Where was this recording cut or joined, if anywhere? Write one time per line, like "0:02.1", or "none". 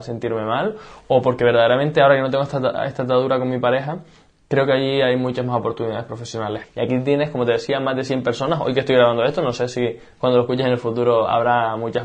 0:06.6